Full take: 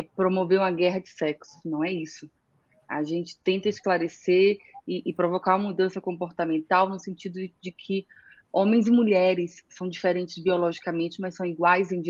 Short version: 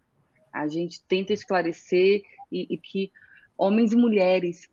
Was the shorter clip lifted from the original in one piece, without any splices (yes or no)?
no